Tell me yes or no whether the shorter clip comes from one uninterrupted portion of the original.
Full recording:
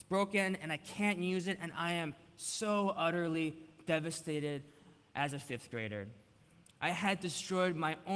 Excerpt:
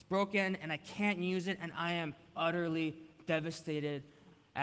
no